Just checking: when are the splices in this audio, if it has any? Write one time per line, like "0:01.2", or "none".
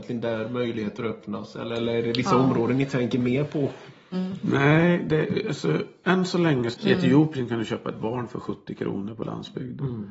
0:04.1
0:06.7